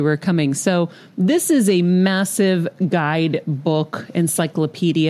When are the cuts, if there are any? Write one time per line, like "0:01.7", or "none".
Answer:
none